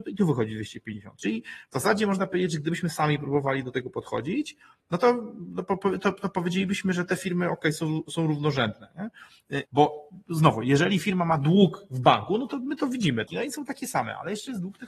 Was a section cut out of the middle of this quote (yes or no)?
yes